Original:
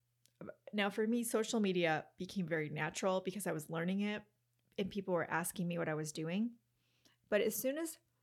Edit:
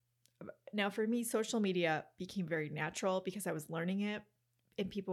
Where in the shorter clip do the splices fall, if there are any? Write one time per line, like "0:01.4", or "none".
none